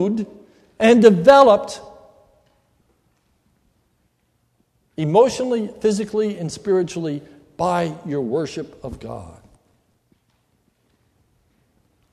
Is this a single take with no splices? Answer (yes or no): yes